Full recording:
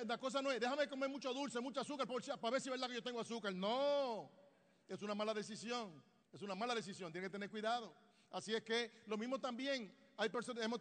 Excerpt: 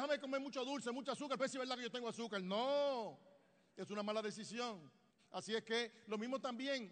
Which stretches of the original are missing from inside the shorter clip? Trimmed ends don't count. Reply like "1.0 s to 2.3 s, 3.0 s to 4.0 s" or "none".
2.1 s to 2.5 s, 6.3 s to 8.2 s